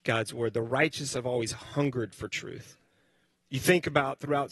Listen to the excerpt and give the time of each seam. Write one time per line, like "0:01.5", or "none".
none